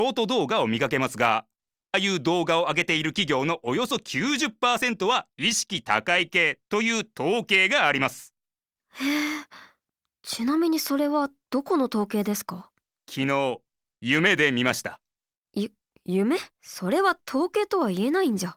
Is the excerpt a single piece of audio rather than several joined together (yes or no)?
no